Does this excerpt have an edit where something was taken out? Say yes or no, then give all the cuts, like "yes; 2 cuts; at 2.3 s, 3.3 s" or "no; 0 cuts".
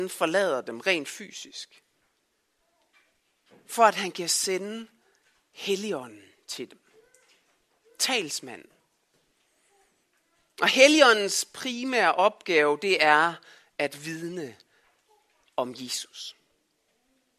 no; 0 cuts